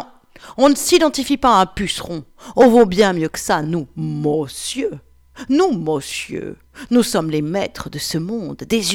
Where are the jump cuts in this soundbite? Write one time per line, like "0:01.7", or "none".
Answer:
none